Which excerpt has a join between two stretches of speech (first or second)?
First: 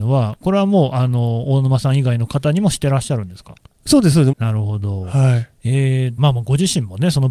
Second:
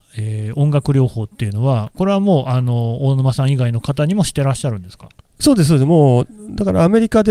first